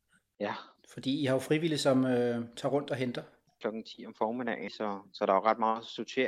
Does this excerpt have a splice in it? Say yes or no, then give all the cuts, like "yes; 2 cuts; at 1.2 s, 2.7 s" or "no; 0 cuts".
yes; 2 cuts; at 3.6 s, 4.7 s